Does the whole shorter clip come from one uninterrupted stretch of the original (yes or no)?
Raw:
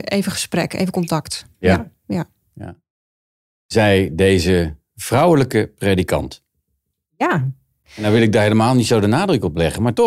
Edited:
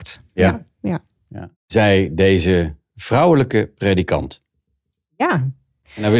no